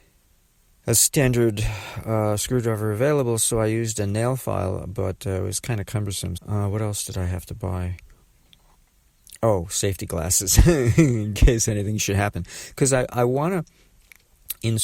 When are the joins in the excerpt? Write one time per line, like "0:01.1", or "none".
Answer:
0:06.4